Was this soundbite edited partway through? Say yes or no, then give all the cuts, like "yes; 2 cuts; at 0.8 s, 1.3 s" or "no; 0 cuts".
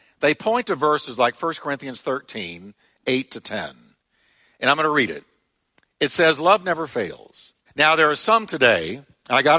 yes; 1 cut; at 7.7 s